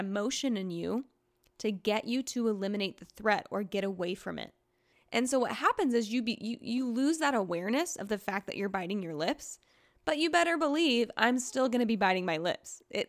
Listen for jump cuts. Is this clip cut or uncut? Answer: cut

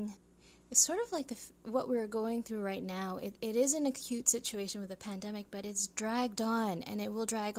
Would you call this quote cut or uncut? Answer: uncut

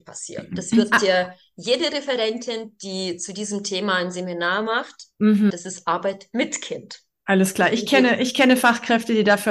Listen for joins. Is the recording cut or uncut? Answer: cut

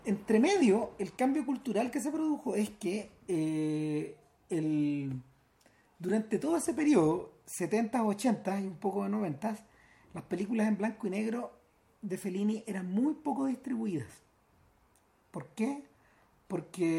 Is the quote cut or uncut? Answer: uncut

